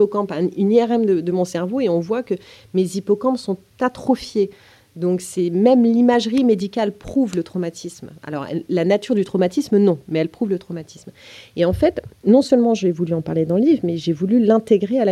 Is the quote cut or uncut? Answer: uncut